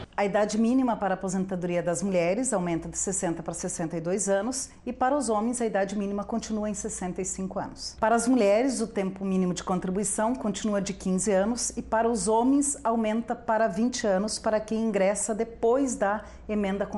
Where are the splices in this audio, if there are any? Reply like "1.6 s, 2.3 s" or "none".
8.0 s